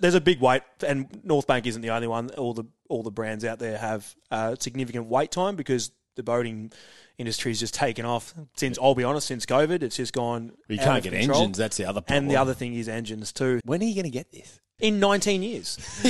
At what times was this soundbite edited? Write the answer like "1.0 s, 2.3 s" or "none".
13.6 s, 14.8 s